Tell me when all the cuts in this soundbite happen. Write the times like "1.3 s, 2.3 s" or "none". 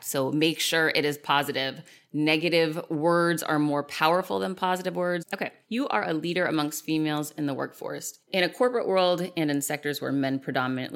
5.2 s